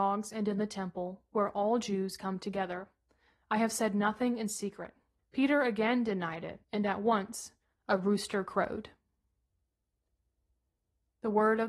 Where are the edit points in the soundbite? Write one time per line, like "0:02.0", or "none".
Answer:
0:05.2
0:06.6